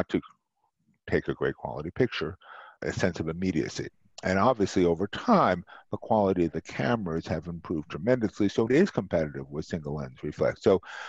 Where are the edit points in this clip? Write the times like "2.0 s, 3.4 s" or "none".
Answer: 2.8 s, 8.7 s